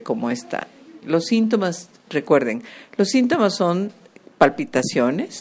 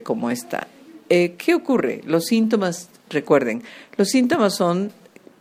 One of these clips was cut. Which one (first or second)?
first